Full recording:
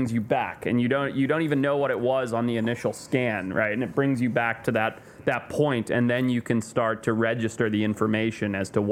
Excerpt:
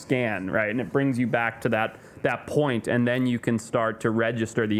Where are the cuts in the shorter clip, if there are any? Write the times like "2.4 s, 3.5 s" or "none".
none